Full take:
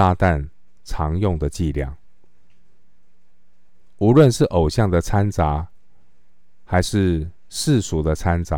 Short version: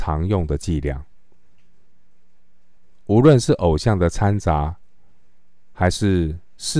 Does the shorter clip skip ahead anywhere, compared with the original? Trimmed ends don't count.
no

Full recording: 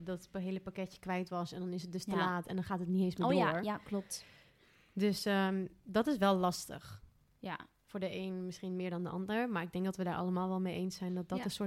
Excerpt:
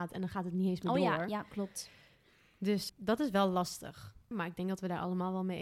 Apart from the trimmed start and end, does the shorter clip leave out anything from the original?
yes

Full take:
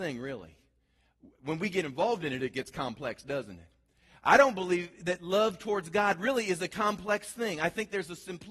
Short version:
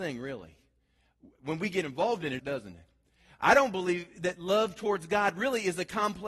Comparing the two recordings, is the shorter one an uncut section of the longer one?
no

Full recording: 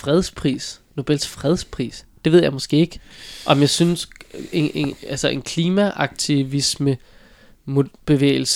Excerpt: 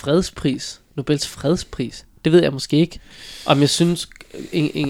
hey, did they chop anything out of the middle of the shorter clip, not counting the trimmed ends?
no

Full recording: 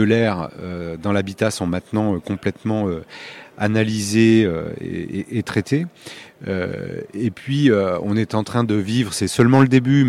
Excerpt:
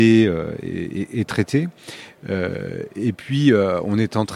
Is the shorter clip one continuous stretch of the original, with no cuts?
yes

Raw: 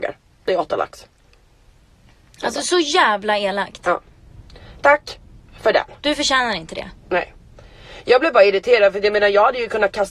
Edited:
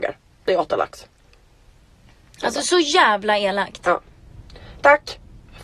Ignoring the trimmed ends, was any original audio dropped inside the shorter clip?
no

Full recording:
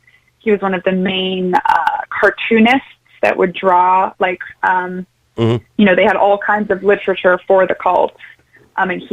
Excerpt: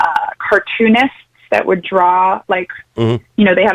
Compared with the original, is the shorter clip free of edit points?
no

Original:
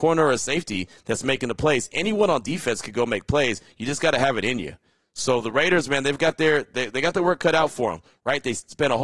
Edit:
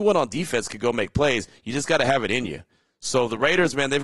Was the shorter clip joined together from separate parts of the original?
no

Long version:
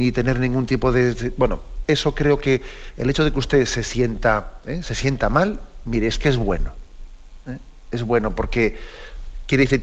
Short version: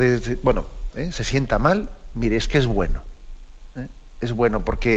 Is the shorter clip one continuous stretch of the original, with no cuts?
no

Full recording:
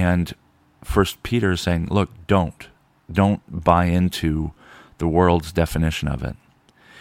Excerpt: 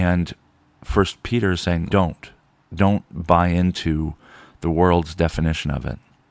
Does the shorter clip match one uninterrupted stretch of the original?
no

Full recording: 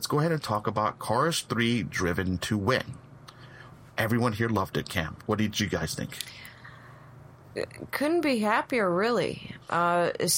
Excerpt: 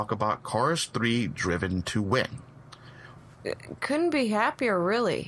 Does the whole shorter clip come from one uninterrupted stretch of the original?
no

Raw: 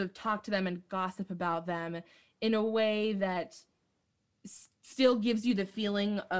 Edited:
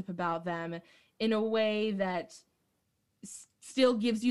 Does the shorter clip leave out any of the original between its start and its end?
no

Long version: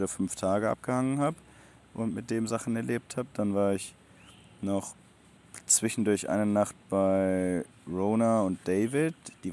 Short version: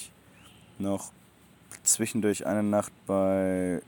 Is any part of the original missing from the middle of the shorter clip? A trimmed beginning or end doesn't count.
no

